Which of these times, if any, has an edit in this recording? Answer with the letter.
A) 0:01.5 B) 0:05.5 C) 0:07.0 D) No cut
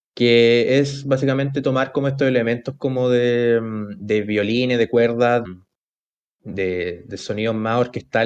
B